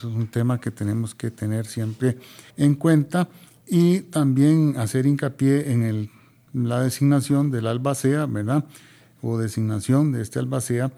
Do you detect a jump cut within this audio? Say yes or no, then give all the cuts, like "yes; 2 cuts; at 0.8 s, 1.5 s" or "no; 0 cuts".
yes; 1 cut; at 2.5 s